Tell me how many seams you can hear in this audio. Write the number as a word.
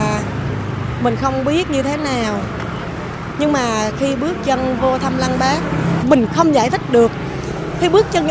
one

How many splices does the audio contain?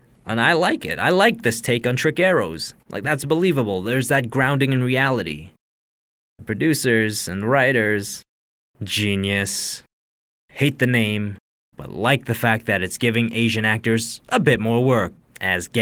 two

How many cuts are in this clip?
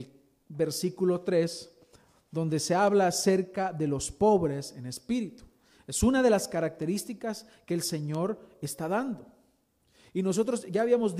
zero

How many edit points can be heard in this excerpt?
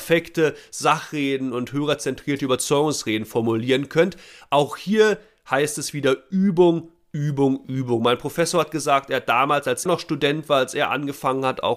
one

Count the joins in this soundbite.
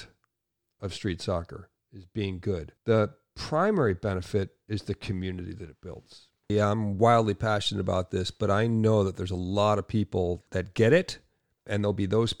three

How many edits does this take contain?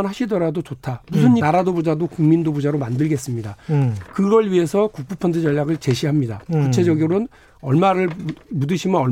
one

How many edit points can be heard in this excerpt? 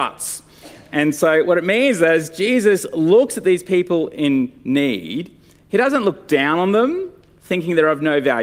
zero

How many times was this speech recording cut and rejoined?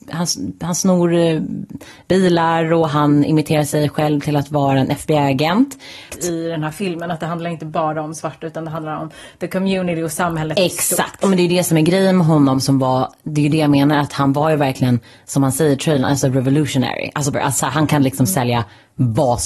two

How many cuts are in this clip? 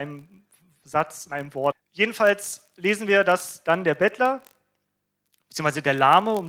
one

